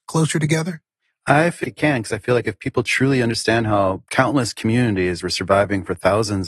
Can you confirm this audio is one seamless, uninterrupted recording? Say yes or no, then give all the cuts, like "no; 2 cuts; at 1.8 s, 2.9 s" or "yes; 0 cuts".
no; 1 cut; at 1.6 s